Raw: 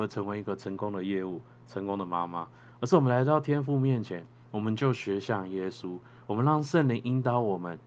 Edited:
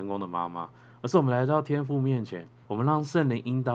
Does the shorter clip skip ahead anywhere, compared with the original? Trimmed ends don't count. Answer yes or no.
yes